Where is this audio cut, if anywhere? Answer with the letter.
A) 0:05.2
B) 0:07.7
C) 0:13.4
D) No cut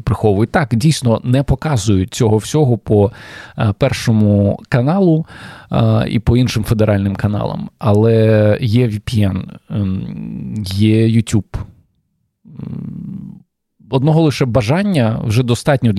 D